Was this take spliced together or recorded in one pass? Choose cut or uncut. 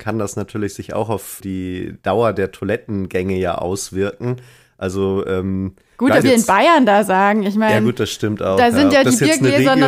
cut